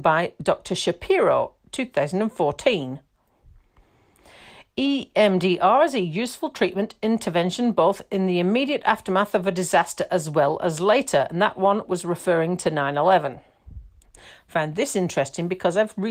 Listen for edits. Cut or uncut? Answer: cut